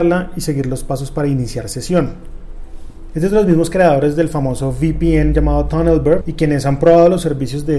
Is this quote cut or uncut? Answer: cut